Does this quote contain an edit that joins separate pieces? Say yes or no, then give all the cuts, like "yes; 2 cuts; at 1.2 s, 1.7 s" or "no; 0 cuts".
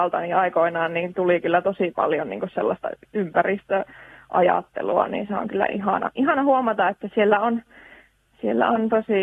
no; 0 cuts